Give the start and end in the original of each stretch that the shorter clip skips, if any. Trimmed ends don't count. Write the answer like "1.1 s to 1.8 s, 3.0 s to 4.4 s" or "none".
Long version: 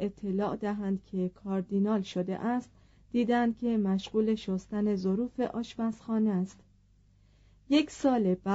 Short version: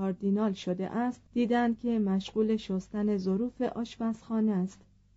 2.8 s to 3.0 s

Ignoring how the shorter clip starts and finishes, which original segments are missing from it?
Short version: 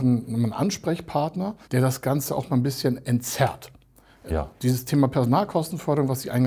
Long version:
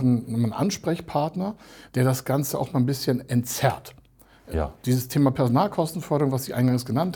1.6 s to 1.9 s

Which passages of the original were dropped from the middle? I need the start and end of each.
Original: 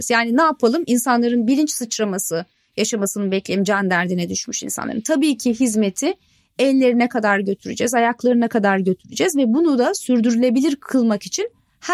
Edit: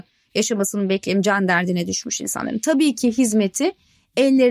none

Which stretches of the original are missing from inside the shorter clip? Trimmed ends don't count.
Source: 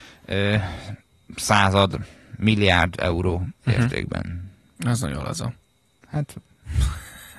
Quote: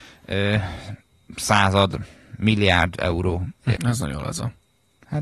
3.7 s to 4.8 s

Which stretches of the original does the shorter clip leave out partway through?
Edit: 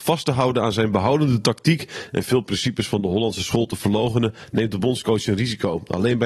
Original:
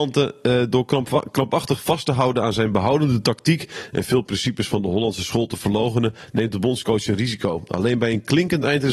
none

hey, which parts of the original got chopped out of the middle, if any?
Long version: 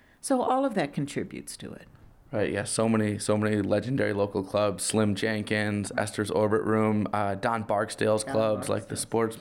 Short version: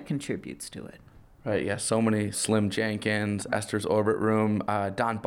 3.2 s to 4.8 s

